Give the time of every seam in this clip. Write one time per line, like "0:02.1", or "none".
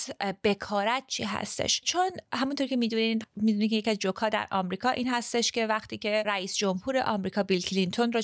none